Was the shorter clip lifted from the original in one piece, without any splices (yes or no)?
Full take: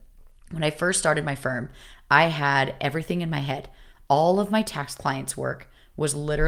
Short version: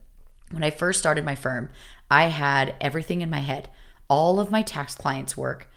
yes